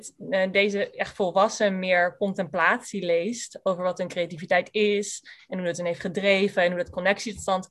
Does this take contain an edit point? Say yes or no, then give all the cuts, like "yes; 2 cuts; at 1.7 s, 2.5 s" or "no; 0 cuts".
no; 0 cuts